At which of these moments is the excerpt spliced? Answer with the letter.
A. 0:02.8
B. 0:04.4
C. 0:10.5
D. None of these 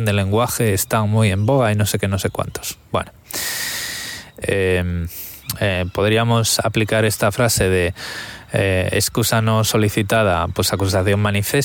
B